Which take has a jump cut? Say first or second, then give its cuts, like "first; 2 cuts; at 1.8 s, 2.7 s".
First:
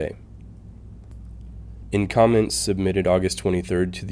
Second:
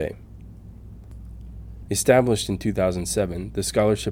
second; 1 cut; at 1.9 s